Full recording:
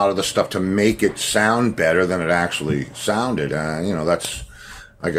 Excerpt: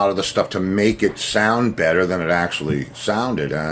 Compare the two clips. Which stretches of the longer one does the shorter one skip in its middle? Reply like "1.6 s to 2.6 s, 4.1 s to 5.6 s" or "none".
none